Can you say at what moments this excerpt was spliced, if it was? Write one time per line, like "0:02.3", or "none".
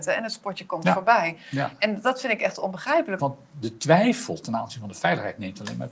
0:03.2